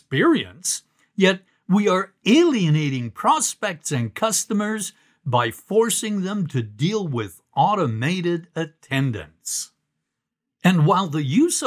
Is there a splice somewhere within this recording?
no; 0 cuts

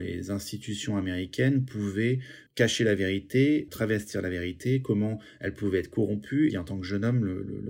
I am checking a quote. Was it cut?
yes; 1 cut; at 6.5 s

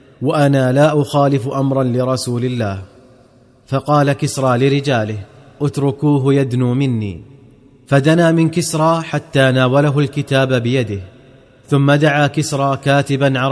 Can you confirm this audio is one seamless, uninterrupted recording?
yes; 0 cuts

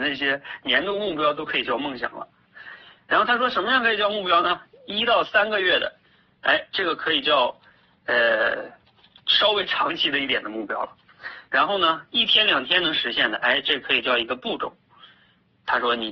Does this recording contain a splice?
yes; 1 cut; at 11.5 s

